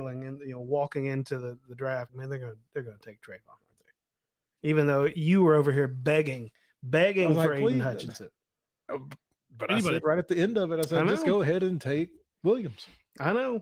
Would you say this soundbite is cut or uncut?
cut